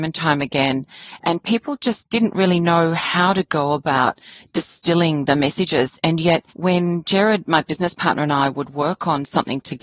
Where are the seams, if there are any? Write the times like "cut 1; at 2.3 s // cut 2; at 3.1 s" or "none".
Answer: cut 1; at 6.5 s